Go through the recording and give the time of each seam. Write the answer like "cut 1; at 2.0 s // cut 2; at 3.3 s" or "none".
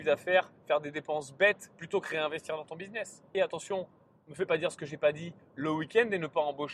cut 1; at 3.3 s